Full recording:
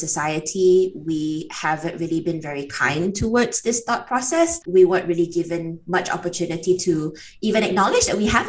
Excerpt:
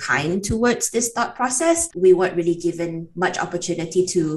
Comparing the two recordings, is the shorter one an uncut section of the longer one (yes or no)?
yes